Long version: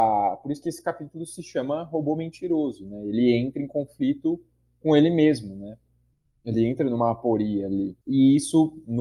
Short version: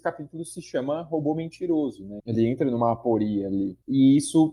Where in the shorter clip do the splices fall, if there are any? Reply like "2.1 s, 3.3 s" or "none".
2.2 s